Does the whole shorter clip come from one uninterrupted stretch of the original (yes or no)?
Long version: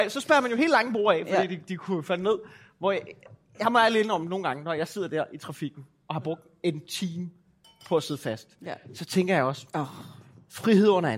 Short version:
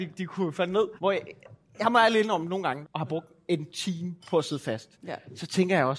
no